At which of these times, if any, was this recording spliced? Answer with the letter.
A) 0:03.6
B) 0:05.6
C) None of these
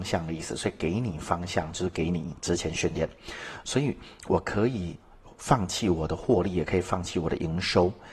A